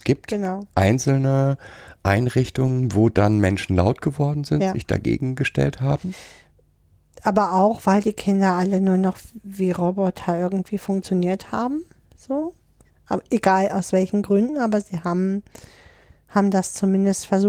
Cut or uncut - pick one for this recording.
uncut